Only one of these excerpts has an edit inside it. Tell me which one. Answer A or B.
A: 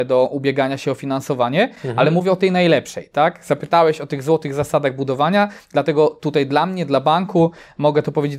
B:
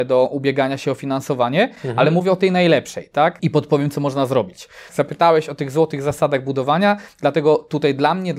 B